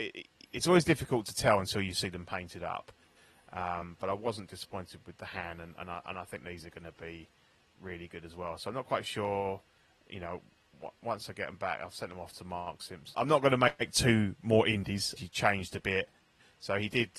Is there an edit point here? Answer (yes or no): yes